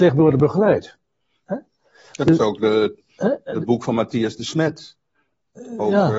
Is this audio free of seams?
yes; 0 cuts

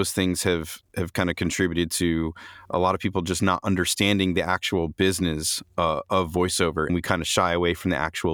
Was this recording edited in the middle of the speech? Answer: yes; 1 cut; at 6.9 s

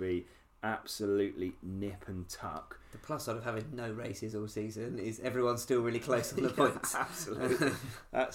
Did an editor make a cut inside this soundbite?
no; 0 cuts

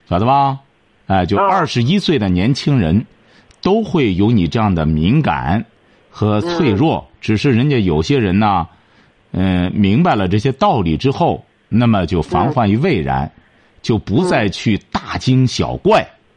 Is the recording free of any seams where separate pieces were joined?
yes; 0 cuts

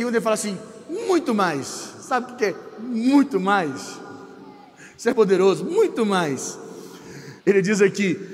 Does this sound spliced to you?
yes; 2 cuts; at 5.1 s, 7.4 s

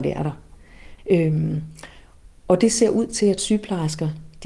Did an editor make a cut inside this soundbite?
yes; 1 cut; at 1.0 s

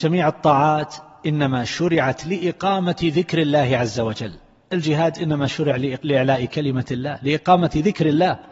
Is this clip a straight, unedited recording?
yes; 0 cuts

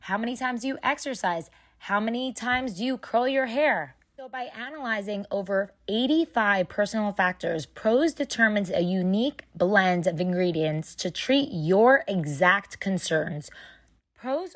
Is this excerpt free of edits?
yes; 0 cuts

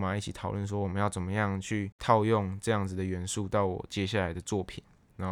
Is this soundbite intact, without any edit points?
yes; 0 cuts

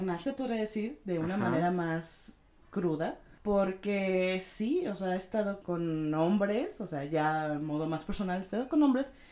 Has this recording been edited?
yes; 1 cut; at 5.6 s

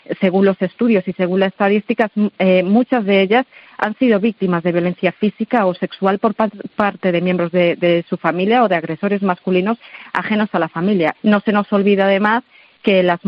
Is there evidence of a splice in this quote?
yes; 1 cut; at 11.1 s

